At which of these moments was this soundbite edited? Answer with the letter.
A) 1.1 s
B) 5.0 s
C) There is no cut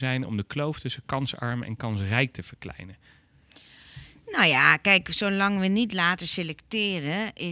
C